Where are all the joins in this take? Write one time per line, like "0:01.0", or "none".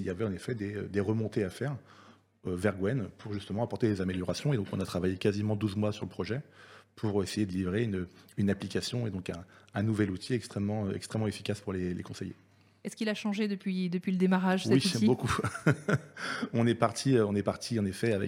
none